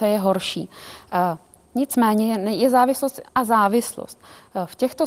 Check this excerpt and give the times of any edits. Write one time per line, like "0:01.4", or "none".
0:03.3